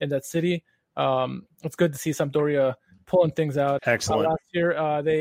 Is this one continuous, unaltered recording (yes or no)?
no